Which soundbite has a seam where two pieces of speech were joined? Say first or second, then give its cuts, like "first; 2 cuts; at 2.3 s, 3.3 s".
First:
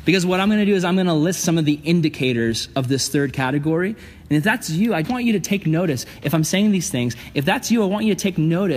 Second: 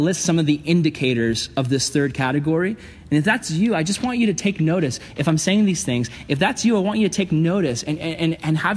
first; 1 cut; at 5.0 s